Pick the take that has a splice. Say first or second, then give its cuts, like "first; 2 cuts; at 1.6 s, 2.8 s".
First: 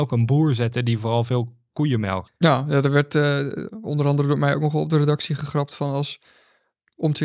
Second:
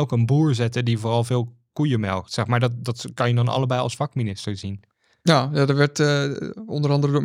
first; 1 cut; at 2.3 s